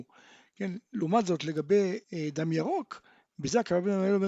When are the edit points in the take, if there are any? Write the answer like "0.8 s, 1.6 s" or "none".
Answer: 2.0 s